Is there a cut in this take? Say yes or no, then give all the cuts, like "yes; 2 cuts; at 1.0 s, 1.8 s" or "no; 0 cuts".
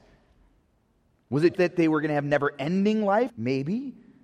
yes; 2 cuts; at 1.5 s, 3.3 s